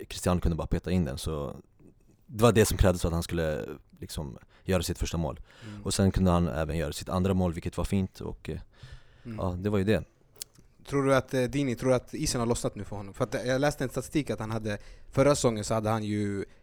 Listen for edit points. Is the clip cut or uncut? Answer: uncut